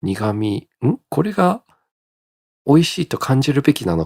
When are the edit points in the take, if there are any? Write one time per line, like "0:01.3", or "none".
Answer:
none

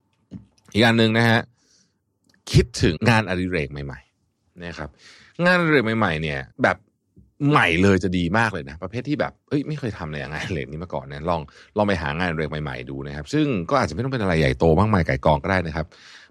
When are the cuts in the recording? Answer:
0:03.0
0:06.5

